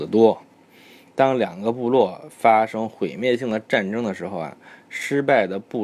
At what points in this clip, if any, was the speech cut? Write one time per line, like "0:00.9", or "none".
none